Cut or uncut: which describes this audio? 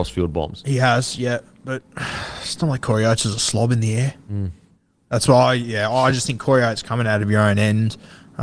uncut